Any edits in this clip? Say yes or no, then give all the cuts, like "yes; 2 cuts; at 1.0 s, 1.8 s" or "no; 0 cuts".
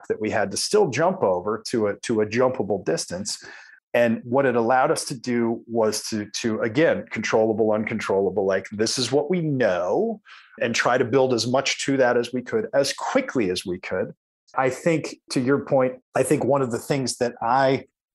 yes; 2 cuts; at 14.5 s, 16.0 s